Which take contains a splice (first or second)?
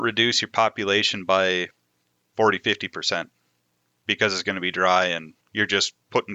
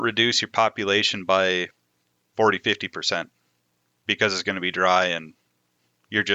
first